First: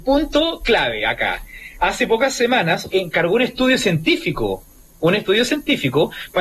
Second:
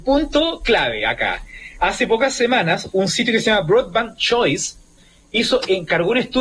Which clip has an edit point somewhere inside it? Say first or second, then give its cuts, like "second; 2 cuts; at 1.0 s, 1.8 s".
first; 1 cut; at 2.9 s